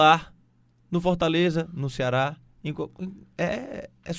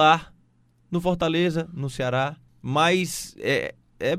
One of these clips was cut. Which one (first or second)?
second